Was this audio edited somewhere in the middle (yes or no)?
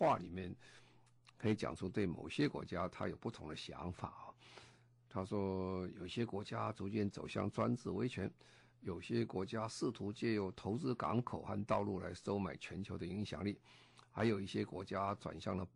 no